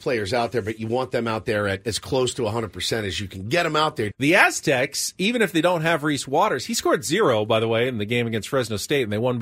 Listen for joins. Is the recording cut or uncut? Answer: cut